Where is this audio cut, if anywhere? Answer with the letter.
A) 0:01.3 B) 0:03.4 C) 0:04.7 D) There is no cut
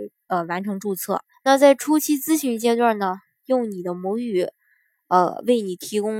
A